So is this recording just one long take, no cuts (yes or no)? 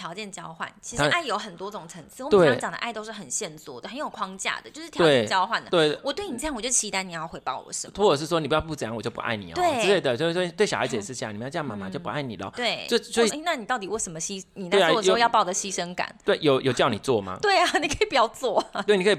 no